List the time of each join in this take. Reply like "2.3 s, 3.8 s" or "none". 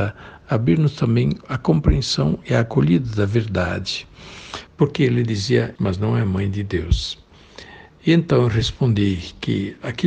4.7 s, 5.8 s